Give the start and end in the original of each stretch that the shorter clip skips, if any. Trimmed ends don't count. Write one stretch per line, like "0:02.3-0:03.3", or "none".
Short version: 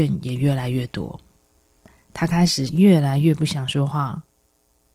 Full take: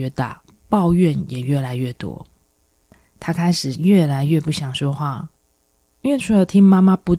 none